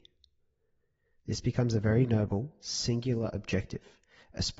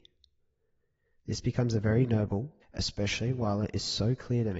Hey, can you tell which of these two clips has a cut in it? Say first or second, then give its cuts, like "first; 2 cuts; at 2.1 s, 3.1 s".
second; 1 cut; at 2.6 s